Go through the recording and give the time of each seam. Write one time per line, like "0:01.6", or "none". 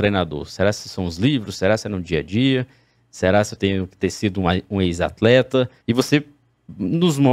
0:05.8